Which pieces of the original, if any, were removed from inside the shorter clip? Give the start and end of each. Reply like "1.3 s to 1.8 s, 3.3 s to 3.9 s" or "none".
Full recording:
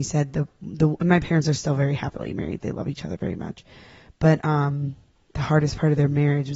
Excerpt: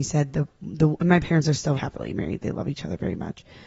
1.8 s to 2.0 s